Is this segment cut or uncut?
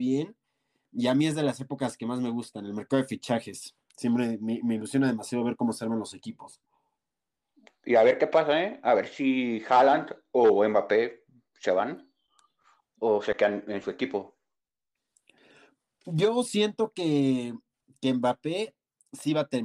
uncut